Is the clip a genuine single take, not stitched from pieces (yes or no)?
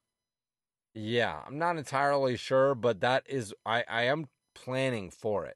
yes